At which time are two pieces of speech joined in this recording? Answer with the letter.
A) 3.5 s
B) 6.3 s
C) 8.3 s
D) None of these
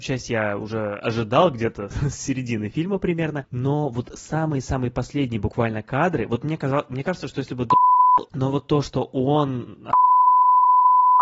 C